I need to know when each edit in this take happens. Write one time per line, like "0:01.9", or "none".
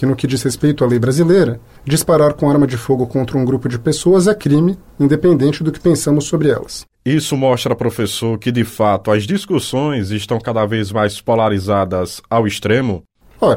none